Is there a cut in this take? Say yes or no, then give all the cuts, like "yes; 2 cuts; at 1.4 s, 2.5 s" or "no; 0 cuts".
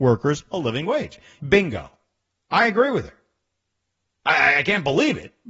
yes; 1 cut; at 1.4 s